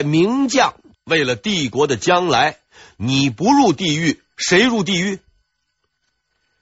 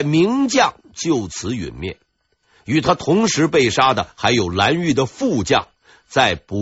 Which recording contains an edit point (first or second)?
first